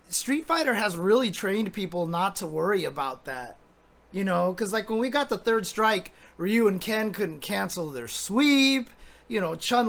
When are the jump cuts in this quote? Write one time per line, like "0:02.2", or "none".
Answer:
none